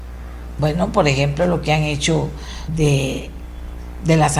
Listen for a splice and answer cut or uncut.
cut